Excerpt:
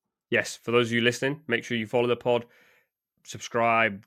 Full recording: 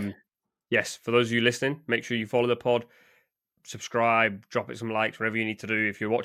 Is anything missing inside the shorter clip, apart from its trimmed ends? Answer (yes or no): no